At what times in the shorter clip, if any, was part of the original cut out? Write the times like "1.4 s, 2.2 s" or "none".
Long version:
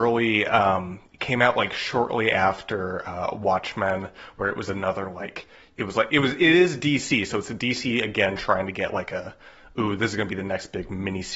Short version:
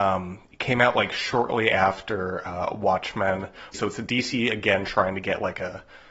3.7 s